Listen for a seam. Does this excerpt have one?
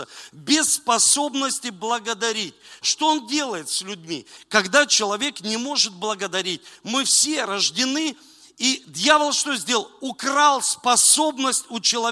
yes; 1 cut; at 2.8 s

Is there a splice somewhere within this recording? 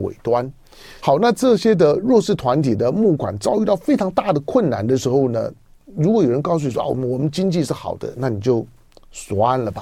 yes; 1 cut; at 1.0 s

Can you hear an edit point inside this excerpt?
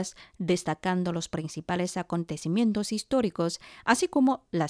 no; 0 cuts

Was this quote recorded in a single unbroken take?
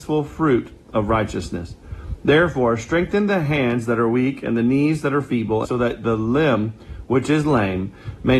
no; 1 cut; at 5.6 s

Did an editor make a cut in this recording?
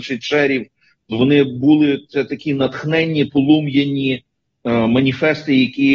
no; 0 cuts

